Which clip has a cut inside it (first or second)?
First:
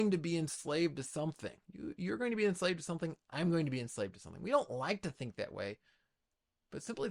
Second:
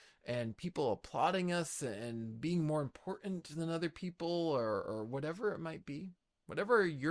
first